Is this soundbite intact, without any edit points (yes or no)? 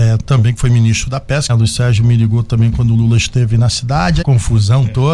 no